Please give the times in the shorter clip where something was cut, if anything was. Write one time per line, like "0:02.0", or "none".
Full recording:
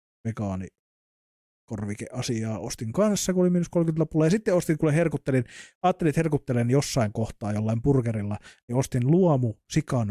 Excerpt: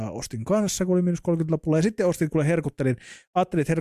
none